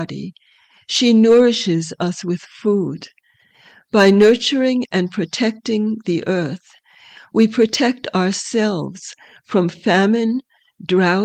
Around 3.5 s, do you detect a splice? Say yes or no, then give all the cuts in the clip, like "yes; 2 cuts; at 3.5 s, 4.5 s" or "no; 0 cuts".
no; 0 cuts